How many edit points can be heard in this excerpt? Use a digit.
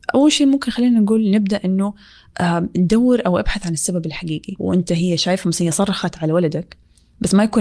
1